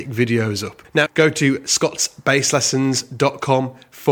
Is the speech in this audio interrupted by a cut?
yes; 1 cut; at 1.1 s

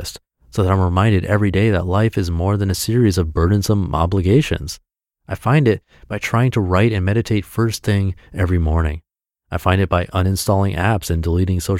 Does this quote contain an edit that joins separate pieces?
no; 0 cuts

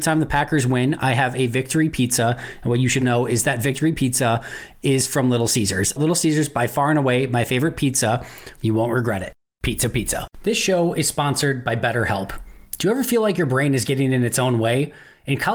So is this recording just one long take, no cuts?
no; 3 cuts; at 3.0 s, 6.0 s, 8.6 s

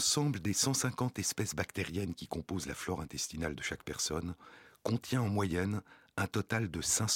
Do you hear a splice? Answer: no; 0 cuts

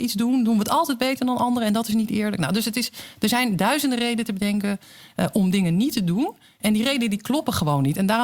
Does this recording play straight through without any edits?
yes; 0 cuts

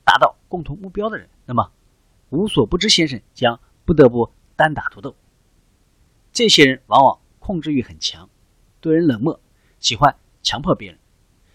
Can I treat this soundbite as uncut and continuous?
yes; 0 cuts

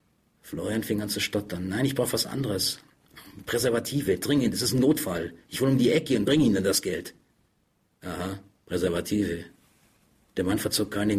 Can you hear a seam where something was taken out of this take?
no; 0 cuts

